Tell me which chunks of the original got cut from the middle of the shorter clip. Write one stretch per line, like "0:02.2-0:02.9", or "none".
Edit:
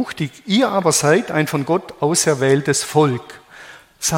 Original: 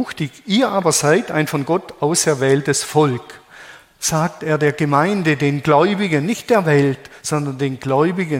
none